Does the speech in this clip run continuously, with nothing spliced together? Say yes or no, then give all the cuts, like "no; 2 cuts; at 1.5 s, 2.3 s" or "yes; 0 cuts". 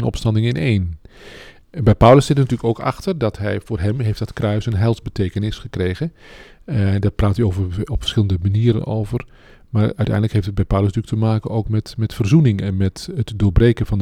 yes; 0 cuts